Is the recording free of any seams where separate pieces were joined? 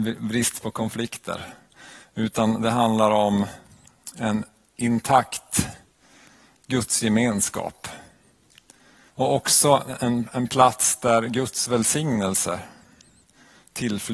no; 1 cut; at 9.1 s

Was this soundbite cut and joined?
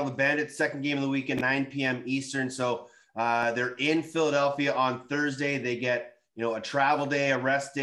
no; 0 cuts

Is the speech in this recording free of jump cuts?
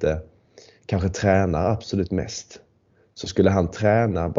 yes; 0 cuts

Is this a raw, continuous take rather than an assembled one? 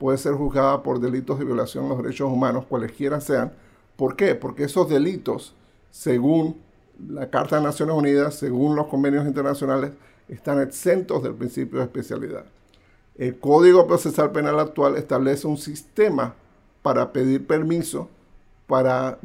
no; 1 cut; at 13.1 s

